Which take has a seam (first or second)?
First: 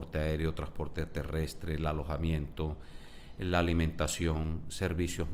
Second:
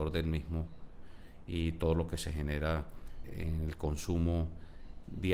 second